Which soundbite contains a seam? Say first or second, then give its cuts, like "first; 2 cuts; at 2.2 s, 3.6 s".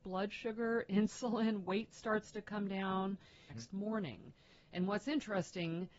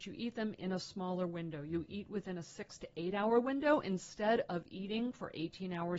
first; 1 cut; at 3.5 s